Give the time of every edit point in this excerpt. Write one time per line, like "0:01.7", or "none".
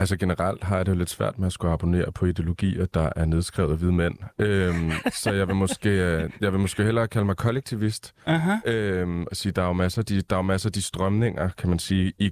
none